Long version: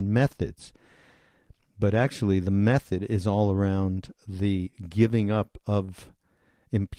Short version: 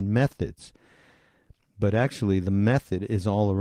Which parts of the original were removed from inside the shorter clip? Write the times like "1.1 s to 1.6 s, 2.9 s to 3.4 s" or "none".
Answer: none